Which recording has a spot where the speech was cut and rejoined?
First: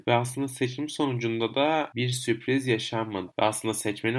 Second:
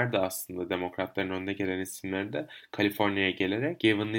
first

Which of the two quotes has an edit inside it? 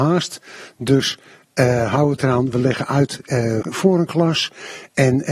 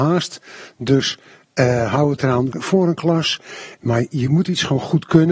second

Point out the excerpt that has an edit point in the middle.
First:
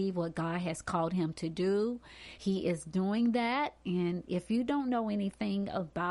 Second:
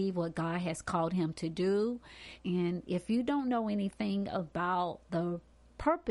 second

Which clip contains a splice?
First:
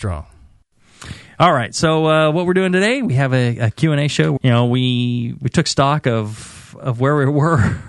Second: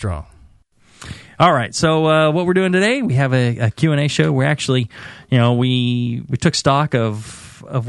first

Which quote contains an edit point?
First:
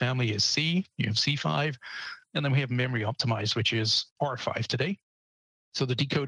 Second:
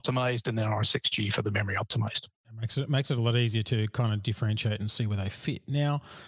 second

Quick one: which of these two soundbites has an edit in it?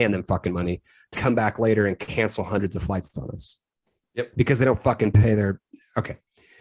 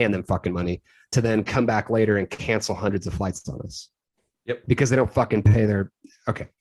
first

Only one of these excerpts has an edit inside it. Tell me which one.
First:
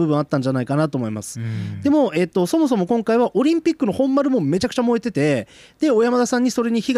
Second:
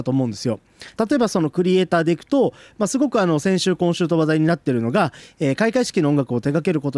second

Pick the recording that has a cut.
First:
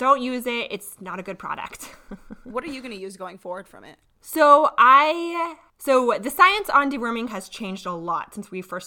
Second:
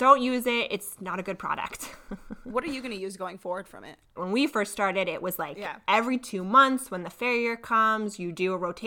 second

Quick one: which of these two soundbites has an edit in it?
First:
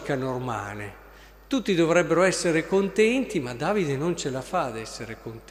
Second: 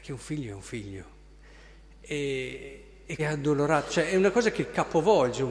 second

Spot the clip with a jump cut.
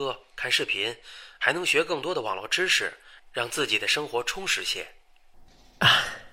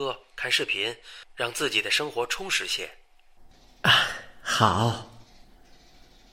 second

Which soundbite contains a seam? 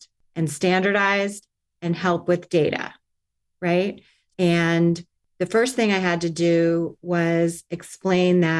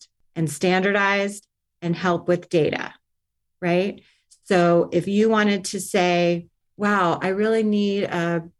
first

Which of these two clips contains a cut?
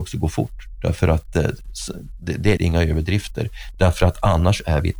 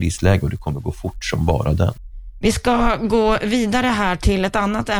first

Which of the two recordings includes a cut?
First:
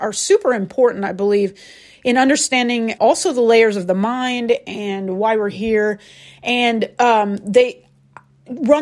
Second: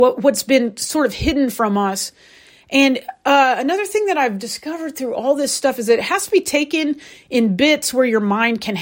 first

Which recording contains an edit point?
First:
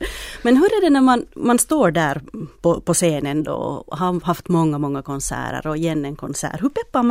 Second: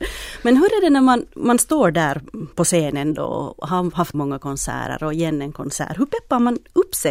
second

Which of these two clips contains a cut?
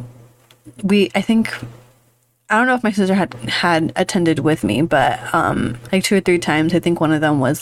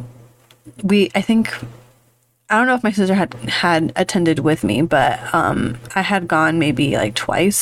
first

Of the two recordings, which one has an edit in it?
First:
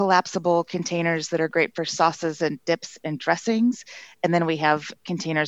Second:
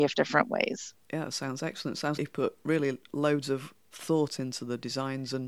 second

